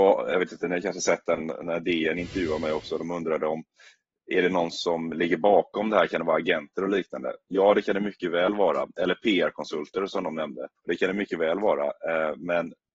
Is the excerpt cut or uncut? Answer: cut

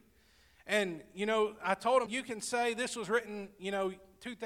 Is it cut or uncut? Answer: cut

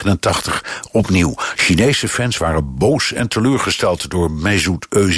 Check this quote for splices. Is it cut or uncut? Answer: cut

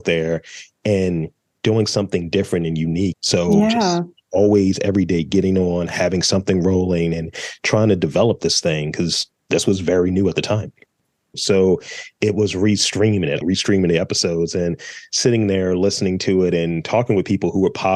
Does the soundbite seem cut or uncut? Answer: cut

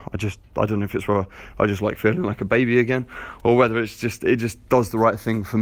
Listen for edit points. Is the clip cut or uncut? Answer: cut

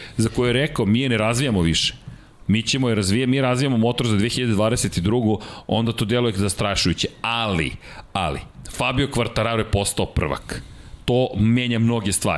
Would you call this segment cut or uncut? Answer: uncut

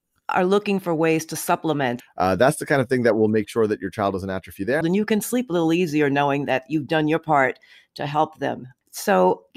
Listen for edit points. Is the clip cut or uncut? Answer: cut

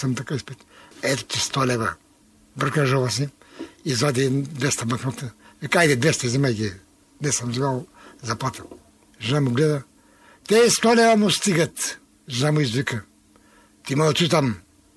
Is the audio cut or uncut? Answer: cut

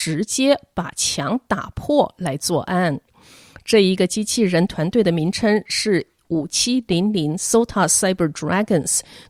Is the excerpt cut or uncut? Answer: uncut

